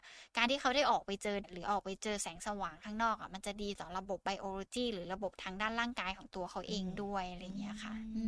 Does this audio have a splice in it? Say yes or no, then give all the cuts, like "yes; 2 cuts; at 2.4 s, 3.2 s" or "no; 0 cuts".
yes; 1 cut; at 1.4 s